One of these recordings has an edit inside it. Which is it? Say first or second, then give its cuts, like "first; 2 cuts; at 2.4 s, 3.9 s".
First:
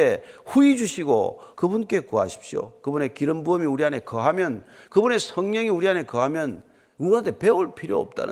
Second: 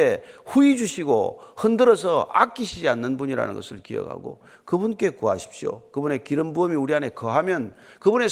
first; 1 cut; at 1.5 s